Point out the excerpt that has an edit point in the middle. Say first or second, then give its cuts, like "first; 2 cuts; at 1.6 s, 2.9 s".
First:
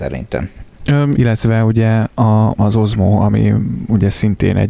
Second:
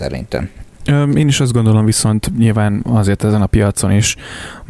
first; 2 cuts; at 1.1 s, 2.6 s